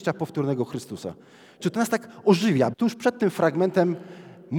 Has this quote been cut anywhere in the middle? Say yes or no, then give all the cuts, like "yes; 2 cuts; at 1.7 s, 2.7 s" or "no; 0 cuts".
yes; 2 cuts; at 1.6 s, 2.7 s